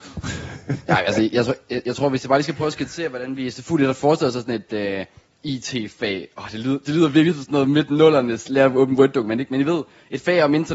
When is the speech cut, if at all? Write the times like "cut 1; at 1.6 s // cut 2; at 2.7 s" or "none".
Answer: none